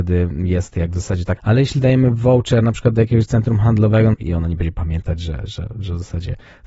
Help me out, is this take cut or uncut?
cut